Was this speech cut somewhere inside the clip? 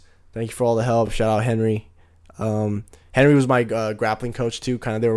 no; 0 cuts

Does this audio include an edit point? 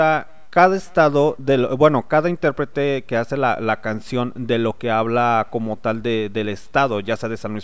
no; 0 cuts

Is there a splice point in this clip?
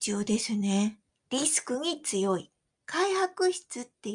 yes; 2 cuts; at 1.1 s, 2.7 s

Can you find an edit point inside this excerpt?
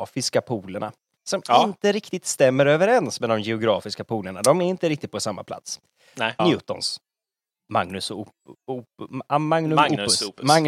yes; 2 cuts; at 1.2 s, 6.4 s

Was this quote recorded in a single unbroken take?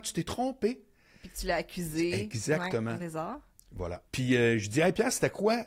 no; 2 cuts; at 3.0 s, 4.1 s

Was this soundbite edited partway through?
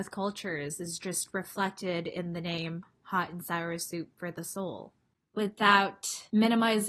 no; 0 cuts

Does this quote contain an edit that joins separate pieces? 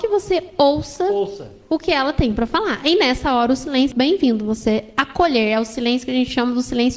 yes; 1 cut; at 3.9 s

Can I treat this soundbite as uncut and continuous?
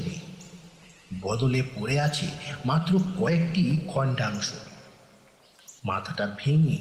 no; 1 cut; at 5.8 s

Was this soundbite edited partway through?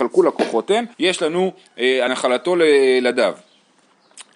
yes; 2 cuts; at 0.9 s, 2.1 s

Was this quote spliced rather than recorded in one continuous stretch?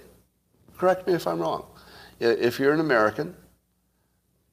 no; 0 cuts

